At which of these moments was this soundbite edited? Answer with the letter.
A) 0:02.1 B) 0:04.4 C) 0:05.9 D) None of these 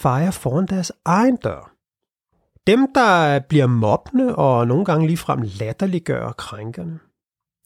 D